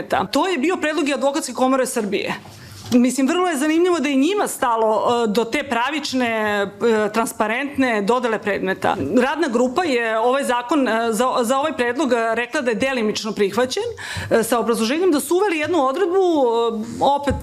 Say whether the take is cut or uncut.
uncut